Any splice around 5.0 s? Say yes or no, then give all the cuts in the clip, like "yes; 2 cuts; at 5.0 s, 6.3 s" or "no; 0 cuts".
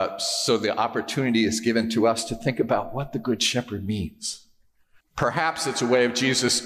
yes; 1 cut; at 5.0 s